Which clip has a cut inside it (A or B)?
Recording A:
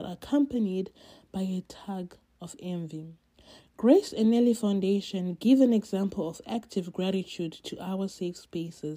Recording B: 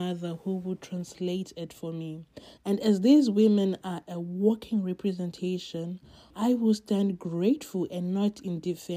B